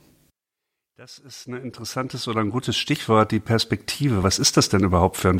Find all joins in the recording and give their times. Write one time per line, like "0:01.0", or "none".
none